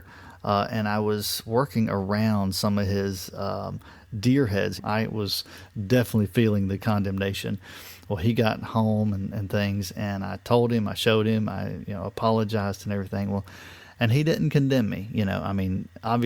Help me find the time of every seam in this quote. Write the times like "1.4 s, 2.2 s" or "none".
4.8 s